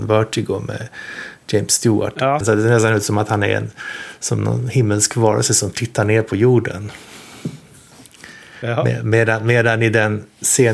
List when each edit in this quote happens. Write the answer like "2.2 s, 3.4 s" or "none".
2.4 s